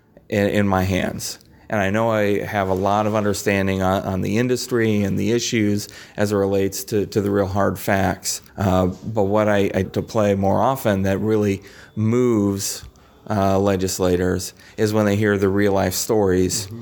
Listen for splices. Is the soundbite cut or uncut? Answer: cut